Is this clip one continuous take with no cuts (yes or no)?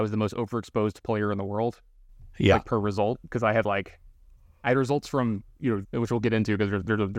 no